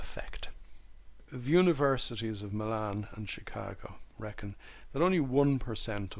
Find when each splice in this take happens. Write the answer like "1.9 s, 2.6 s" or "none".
none